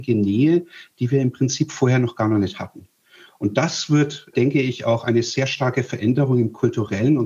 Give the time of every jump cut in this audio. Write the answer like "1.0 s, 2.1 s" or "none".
4.3 s